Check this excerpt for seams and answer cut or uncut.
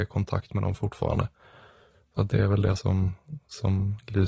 uncut